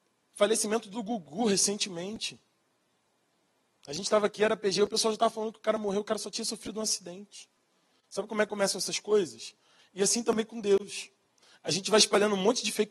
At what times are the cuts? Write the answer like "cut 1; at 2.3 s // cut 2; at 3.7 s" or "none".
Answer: cut 1; at 9.8 s